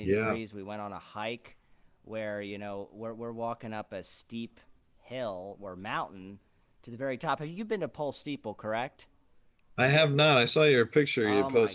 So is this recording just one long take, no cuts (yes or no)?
yes